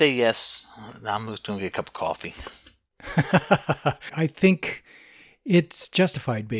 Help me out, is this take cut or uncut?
cut